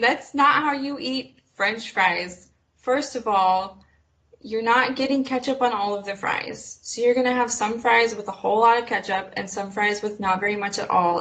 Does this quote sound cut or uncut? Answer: uncut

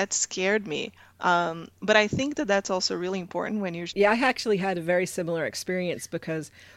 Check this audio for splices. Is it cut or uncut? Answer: cut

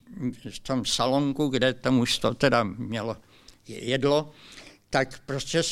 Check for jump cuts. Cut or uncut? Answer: uncut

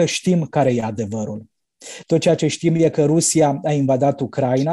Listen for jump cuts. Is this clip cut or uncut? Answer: cut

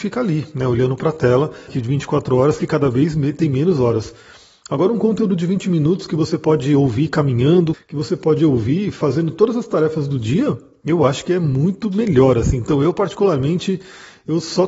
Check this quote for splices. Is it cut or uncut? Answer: cut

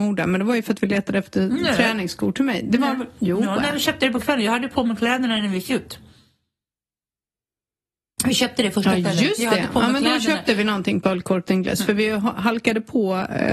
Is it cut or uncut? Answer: uncut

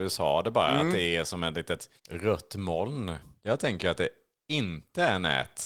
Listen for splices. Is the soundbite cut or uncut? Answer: cut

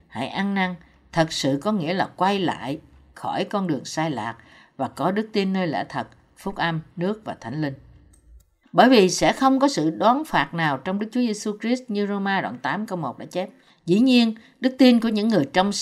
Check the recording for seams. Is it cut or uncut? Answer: cut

